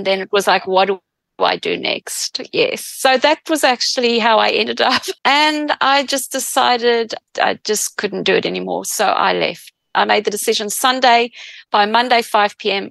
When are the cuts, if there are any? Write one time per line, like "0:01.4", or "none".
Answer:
0:05.2